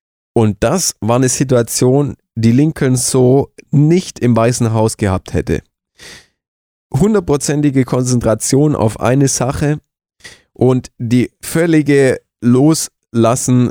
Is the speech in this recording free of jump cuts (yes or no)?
yes